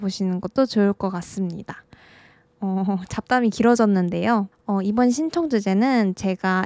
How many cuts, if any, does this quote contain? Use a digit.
1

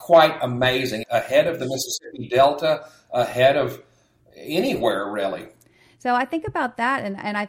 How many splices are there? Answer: 1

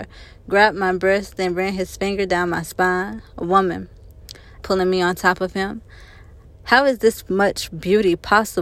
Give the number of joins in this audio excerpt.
2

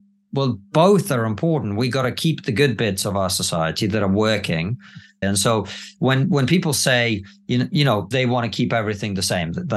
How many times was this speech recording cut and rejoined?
2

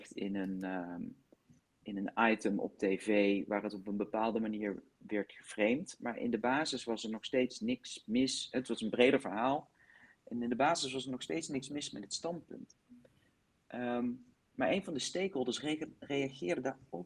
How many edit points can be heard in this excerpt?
0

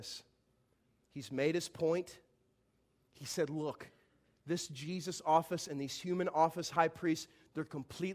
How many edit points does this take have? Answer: 0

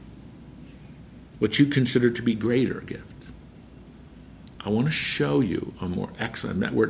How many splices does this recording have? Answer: 1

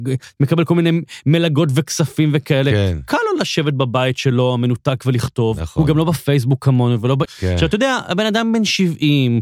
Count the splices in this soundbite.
1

